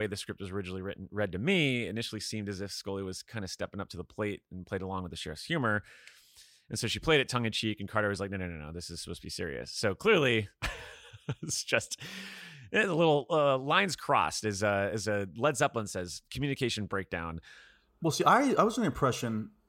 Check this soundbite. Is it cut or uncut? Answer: uncut